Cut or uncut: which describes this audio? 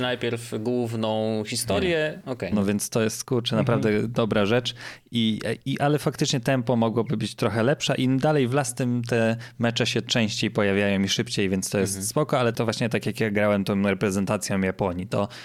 cut